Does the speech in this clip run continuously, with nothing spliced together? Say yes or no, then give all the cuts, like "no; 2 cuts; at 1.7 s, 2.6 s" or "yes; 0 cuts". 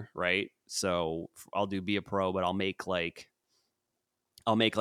yes; 0 cuts